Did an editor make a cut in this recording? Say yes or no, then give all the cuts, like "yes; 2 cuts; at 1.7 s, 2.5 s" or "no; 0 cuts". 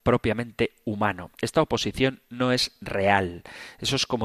no; 0 cuts